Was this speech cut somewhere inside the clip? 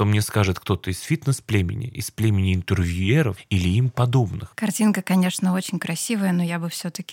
yes; 1 cut; at 4.5 s

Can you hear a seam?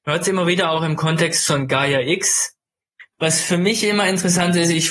yes; 1 cut; at 3.1 s

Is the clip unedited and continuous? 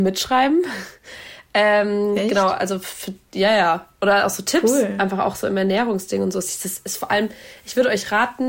yes; 0 cuts

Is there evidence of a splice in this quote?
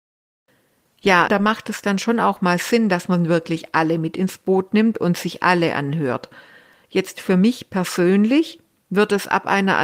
yes; 2 cuts; at 1.3 s, 6.8 s

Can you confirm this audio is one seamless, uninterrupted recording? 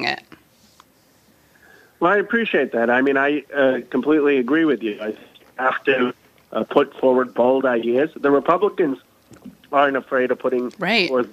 yes; 0 cuts

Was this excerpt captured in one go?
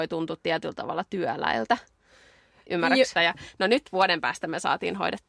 no; 1 cut; at 3.2 s

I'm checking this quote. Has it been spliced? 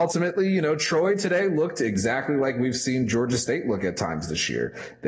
no; 0 cuts

